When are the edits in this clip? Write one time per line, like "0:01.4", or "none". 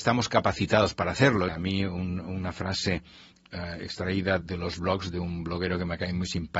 0:01.5
0:04.4